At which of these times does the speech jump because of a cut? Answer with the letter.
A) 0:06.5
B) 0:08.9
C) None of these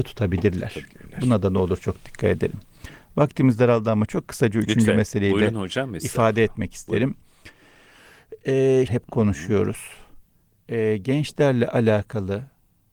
B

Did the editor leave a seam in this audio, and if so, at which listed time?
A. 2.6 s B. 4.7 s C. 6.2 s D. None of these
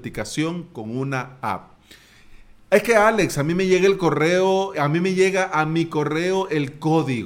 B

